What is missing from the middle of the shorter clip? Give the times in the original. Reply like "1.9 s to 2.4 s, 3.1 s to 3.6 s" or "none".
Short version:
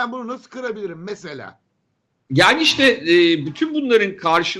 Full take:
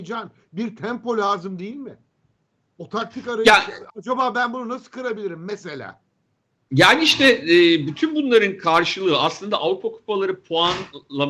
none